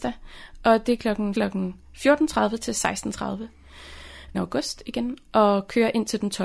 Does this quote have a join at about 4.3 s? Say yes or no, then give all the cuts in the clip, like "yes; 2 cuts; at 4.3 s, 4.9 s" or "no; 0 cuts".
yes; 2 cuts; at 1.3 s, 4.3 s